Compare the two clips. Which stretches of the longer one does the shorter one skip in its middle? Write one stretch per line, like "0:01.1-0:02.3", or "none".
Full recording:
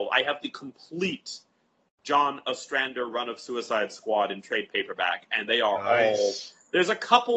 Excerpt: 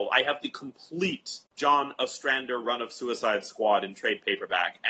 0:01.5-0:01.9